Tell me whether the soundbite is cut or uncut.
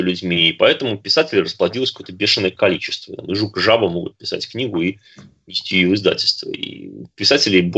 uncut